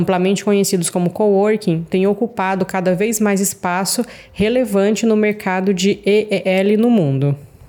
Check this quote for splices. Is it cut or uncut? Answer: uncut